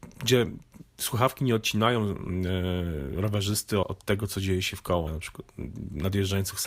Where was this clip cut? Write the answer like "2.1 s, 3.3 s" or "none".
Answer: 3.8 s, 5.1 s